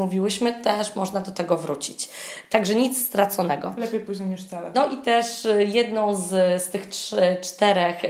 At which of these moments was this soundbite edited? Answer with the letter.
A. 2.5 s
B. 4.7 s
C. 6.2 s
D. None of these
B